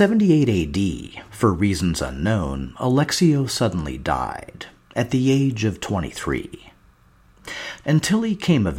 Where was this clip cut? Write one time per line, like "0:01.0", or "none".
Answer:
0:07.8